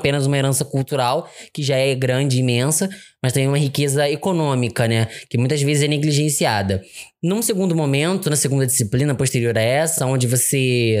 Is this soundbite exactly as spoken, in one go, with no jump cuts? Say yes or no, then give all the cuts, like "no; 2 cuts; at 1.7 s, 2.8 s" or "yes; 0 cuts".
yes; 0 cuts